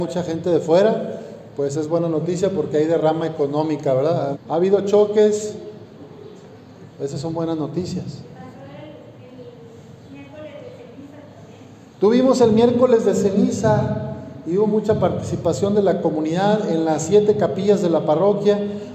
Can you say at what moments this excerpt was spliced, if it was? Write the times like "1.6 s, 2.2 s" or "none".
4.3 s, 6.9 s